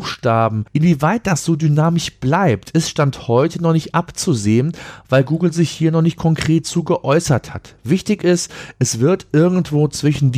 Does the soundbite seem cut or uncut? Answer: uncut